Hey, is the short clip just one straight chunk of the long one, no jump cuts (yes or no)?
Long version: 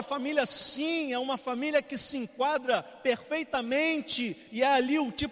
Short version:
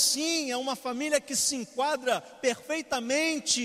yes